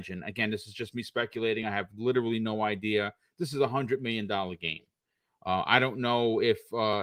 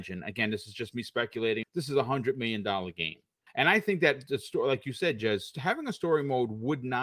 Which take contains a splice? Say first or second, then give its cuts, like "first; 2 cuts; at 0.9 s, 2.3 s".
second; 2 cuts; at 1.6 s, 3.5 s